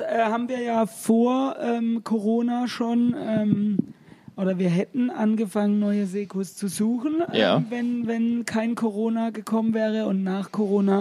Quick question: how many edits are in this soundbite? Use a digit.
0